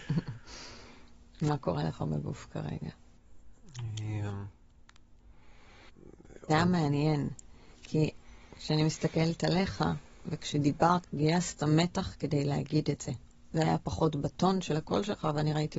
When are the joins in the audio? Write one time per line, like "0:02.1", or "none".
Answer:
0:06.5
0:11.0

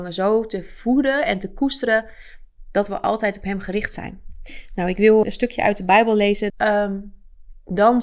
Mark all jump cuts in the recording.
0:05.2
0:06.5

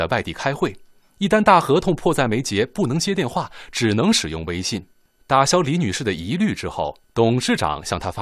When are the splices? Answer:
0:07.0

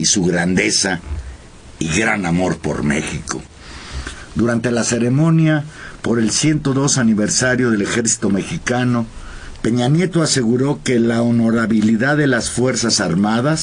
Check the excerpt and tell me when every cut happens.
0:09.6

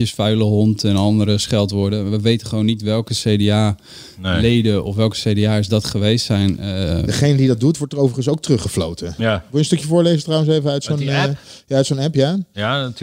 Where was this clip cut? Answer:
0:09.2

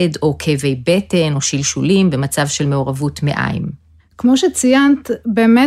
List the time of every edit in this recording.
none

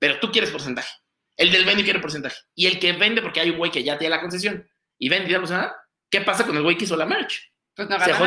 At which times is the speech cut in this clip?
none

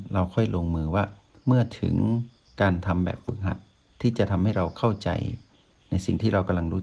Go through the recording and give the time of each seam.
none

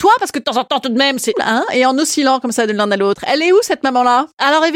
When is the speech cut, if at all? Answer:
0:01.3

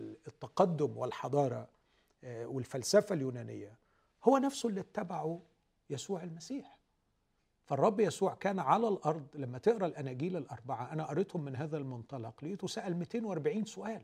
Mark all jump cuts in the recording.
none

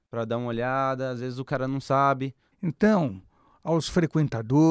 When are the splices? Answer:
0:02.5

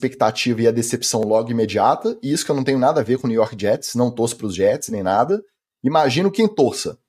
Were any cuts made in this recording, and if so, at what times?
none

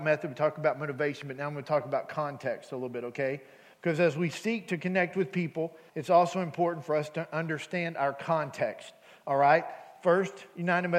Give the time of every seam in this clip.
0:05.9

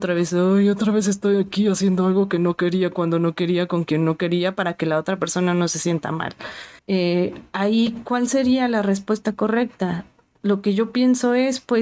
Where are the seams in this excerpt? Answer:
0:06.8

